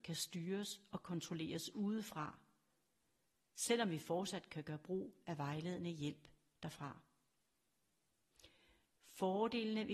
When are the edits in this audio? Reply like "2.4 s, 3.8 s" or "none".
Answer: none